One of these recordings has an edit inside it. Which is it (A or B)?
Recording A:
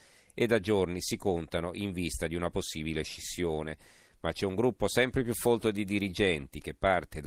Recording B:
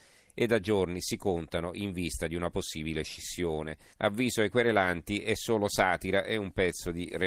B